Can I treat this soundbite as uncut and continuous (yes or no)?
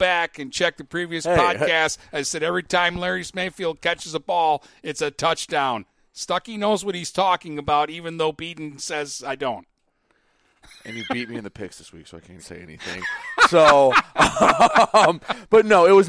no